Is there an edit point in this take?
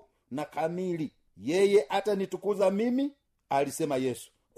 no; 0 cuts

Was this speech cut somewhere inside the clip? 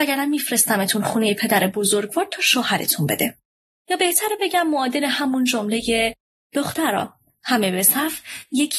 no; 0 cuts

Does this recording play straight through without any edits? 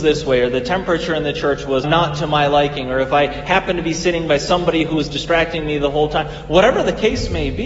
no; 1 cut; at 1.8 s

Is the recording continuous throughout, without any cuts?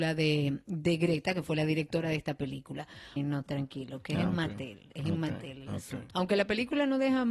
no; 2 cuts; at 3.2 s, 6.1 s

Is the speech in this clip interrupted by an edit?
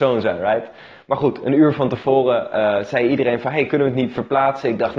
no; 0 cuts

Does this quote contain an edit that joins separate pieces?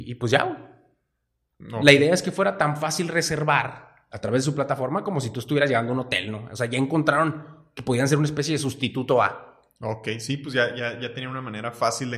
no; 0 cuts

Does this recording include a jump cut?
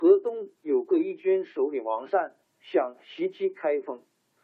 yes; 1 cut; at 2.4 s

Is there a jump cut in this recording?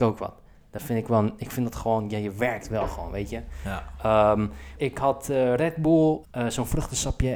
yes; 2 cuts; at 4.8 s, 6.2 s

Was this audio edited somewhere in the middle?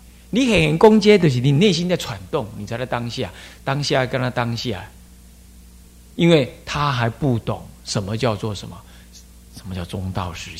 no; 0 cuts

